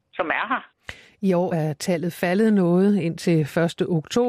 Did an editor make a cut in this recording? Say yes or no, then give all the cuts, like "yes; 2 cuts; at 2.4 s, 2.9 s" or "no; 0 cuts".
no; 0 cuts